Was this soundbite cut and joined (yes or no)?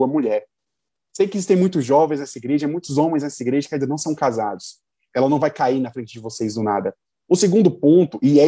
yes